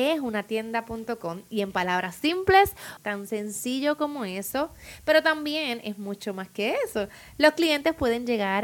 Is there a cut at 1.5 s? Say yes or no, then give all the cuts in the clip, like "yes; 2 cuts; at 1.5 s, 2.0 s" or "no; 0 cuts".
no; 1 cut; at 3.0 s